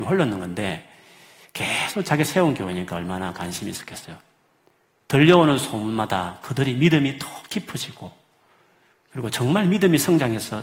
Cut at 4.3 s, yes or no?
no